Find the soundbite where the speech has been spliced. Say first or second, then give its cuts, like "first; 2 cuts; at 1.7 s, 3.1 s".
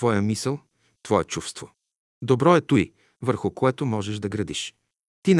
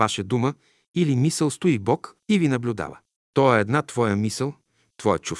second; 1 cut; at 3.2 s